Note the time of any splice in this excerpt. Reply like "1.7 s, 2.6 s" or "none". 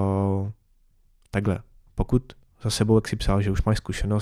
1.9 s